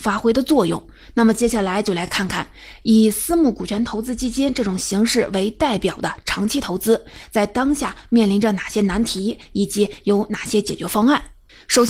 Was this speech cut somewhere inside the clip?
no; 0 cuts

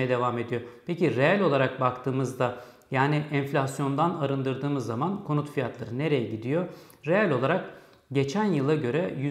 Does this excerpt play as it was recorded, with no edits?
yes; 0 cuts

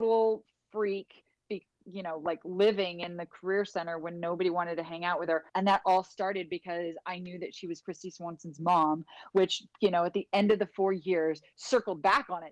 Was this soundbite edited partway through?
yes; 2 cuts; at 1.4 s, 5.5 s

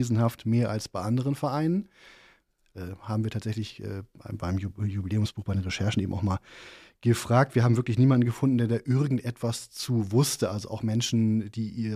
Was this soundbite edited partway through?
yes; 1 cut; at 2.7 s

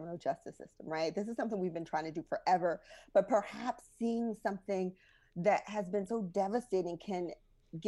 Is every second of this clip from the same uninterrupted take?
yes; 0 cuts

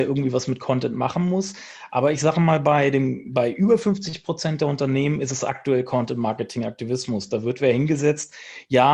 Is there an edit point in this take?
no; 0 cuts

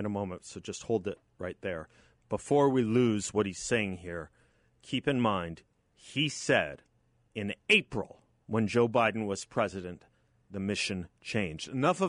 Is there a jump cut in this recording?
no; 0 cuts

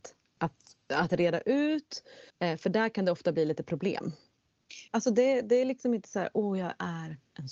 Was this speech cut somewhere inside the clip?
yes; 2 cuts; at 2.3 s, 4.9 s

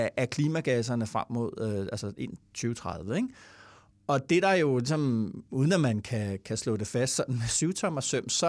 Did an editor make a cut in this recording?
no; 0 cuts

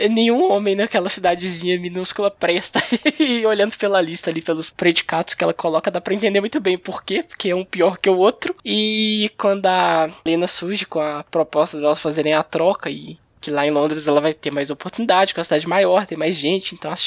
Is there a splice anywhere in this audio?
no; 0 cuts

